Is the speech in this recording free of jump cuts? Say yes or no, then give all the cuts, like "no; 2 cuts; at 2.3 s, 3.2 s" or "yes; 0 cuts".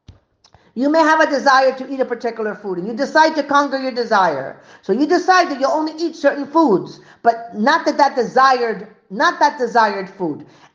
yes; 0 cuts